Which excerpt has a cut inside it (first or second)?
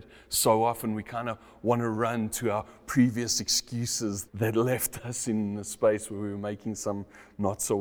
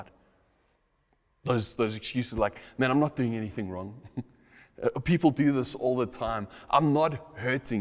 first